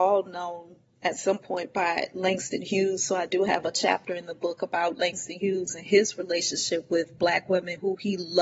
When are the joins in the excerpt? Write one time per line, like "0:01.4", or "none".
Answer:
none